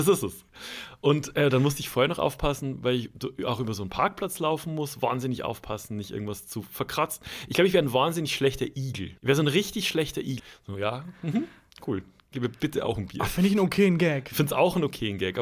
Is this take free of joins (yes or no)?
no